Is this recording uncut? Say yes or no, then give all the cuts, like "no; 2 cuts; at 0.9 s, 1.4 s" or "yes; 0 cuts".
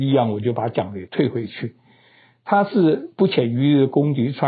yes; 0 cuts